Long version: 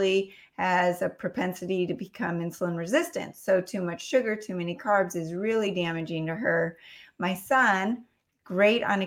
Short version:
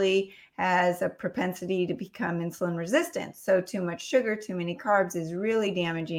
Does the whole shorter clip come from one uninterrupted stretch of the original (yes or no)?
yes